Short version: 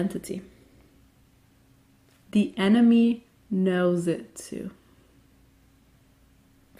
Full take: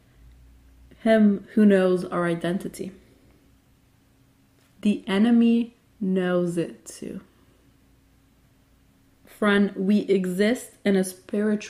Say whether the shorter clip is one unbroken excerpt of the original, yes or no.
yes